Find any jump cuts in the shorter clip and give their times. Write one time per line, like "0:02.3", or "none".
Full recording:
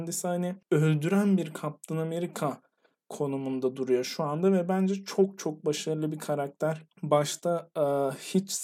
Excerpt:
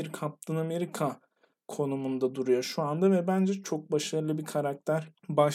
0:03.6